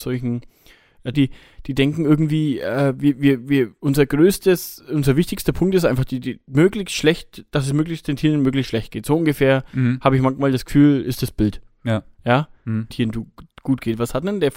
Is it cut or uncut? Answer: cut